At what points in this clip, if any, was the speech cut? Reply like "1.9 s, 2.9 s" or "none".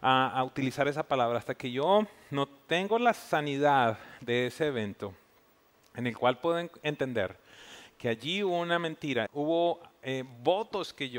9.3 s